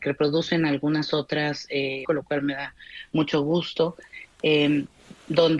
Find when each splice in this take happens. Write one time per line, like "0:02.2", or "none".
0:02.0